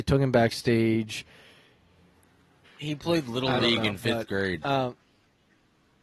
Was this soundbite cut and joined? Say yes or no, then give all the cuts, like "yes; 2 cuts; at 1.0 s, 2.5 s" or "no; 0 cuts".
yes; 1 cut; at 2.6 s